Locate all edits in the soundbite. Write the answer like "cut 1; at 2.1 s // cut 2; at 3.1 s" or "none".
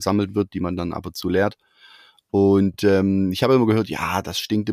none